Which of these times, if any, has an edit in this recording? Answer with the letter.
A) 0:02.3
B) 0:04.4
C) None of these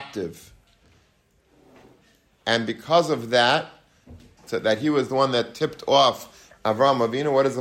B